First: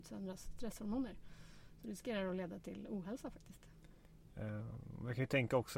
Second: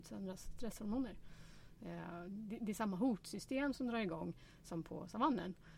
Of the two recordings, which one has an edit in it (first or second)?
second